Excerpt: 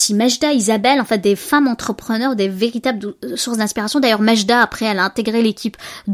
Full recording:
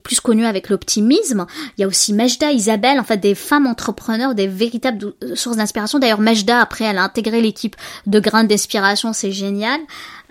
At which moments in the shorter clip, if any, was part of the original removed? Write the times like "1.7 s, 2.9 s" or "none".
none